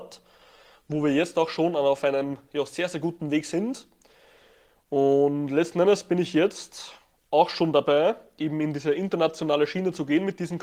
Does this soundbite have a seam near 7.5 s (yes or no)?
no